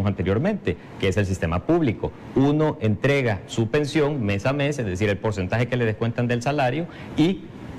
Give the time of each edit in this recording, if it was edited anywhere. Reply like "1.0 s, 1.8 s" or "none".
none